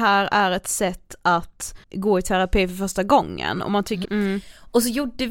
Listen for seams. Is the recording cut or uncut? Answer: cut